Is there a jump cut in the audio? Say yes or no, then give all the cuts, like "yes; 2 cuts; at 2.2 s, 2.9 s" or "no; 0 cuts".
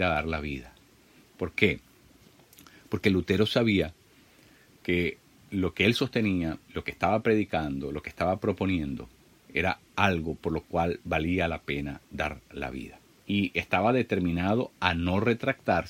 yes; 1 cut; at 13.2 s